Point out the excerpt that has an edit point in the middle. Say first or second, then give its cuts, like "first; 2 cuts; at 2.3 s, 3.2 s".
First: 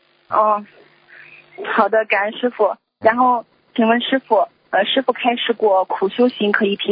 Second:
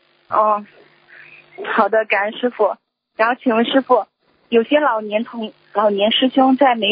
first; 1 cut; at 3.0 s